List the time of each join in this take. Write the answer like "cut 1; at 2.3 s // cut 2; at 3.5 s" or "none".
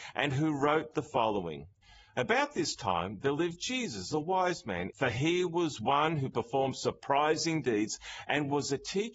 cut 1; at 4.9 s